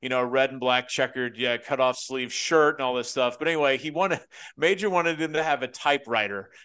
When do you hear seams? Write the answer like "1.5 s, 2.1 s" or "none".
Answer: none